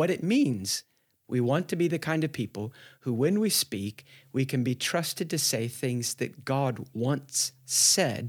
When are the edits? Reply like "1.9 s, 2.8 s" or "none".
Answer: 1.2 s